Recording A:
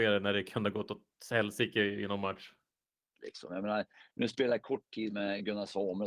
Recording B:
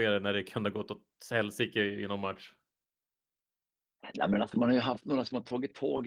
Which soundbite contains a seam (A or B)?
A